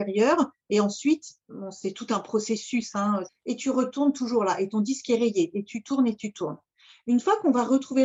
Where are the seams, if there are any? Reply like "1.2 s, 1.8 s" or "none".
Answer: 3.3 s